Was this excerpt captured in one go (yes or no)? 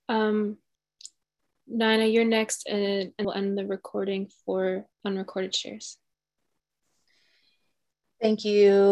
no